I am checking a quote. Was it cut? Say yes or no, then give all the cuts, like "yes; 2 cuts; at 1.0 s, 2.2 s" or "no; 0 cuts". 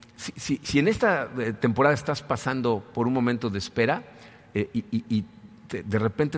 no; 0 cuts